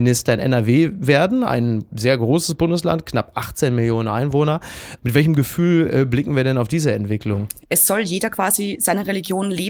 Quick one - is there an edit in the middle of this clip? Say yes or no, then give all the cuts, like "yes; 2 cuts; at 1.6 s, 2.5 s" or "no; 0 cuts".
yes; 1 cut; at 7.6 s